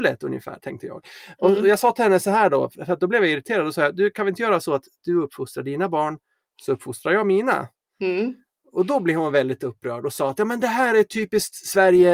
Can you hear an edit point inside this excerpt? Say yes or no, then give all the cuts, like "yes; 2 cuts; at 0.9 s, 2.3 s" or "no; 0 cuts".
no; 0 cuts